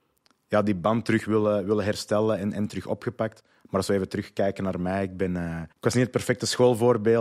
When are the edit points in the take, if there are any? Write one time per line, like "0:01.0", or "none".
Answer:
0:05.7